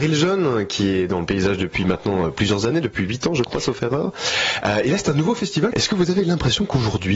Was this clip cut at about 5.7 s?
yes; 1 cut; at 5.7 s

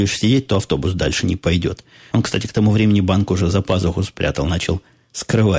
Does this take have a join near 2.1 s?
yes; 1 cut; at 2.1 s

